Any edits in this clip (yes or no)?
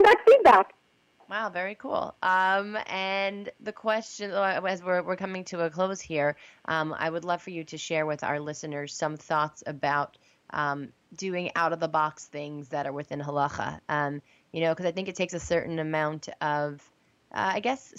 no